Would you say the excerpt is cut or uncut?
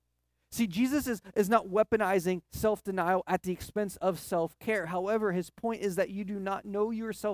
uncut